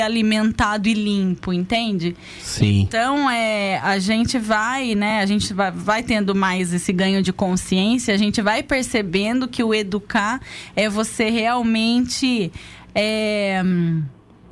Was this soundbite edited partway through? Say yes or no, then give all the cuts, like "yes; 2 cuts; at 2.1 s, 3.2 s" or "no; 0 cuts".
no; 0 cuts